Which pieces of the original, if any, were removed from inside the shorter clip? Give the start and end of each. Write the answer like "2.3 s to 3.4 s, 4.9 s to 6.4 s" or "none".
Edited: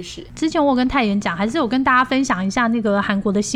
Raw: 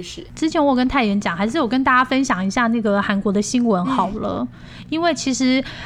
none

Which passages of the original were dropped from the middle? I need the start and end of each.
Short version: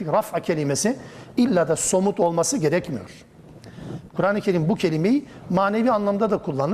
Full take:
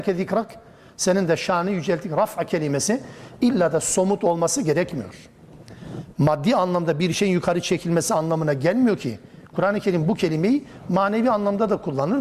6.1 s to 9.5 s

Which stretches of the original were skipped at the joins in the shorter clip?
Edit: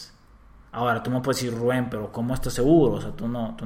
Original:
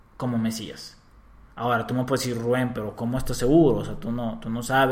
none

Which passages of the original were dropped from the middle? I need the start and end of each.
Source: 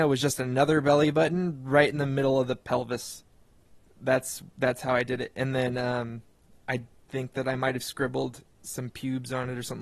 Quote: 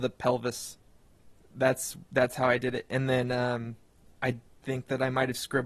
none

